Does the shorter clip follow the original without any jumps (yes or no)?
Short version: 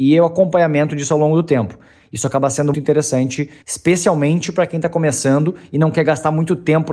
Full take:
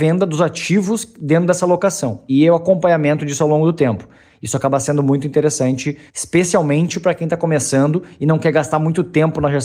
no